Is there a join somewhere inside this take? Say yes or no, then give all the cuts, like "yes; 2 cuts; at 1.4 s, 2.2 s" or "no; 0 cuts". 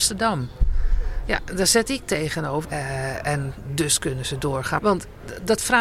yes; 2 cuts; at 2.6 s, 4.8 s